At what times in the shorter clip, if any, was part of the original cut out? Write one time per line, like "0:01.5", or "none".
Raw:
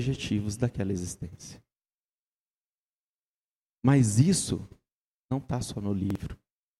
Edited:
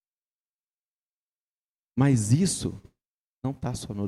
none